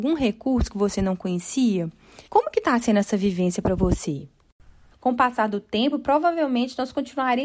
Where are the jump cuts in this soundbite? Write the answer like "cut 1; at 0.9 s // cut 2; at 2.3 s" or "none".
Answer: cut 1; at 2.3 s // cut 2; at 4.9 s